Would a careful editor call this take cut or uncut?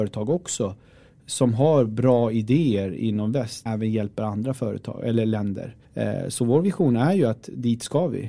cut